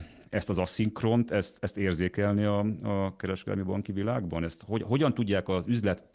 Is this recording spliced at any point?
yes; 1 cut; at 4.8 s

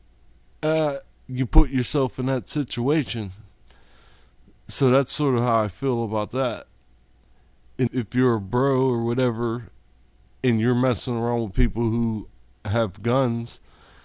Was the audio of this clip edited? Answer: yes; 2 cuts; at 1.1 s, 7.9 s

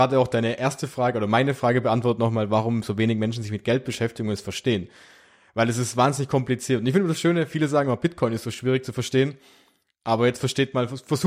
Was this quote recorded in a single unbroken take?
yes; 0 cuts

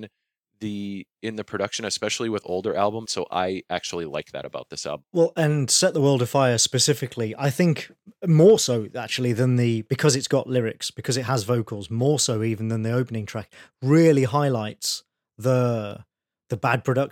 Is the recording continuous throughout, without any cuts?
no; 2 cuts; at 3.1 s, 5.0 s

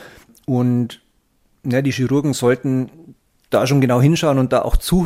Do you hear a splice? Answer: no; 0 cuts

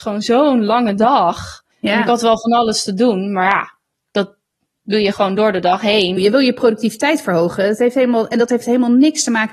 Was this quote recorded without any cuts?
no; 2 cuts; at 1.7 s, 6.2 s

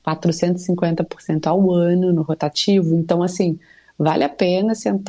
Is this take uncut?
yes; 0 cuts

